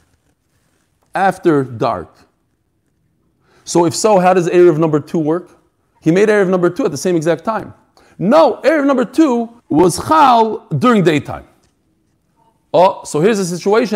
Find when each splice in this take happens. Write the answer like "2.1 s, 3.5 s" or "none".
9.6 s